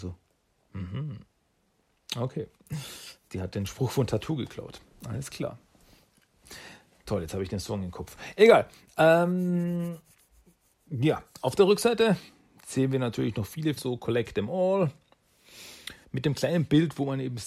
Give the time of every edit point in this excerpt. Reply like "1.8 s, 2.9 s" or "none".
13.8 s, 16.0 s